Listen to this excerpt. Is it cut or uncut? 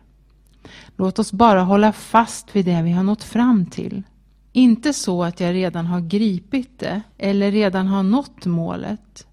cut